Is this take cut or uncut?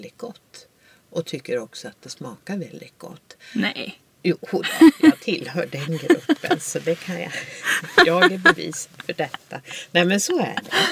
uncut